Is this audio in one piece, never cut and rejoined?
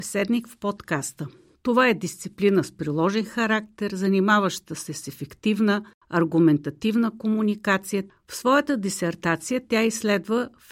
no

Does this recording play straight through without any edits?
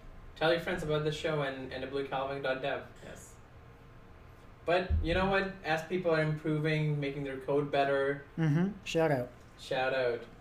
no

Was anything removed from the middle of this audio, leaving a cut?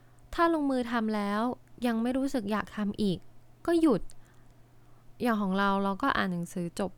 no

